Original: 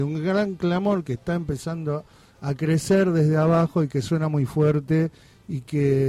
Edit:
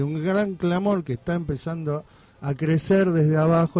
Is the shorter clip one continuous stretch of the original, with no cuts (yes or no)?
yes